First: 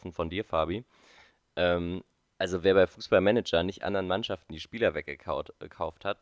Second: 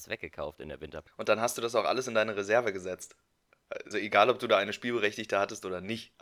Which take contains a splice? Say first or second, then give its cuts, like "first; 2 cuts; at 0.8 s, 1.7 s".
second; 2 cuts; at 1.1 s, 3.9 s